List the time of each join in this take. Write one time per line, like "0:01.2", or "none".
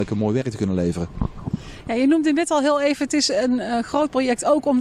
none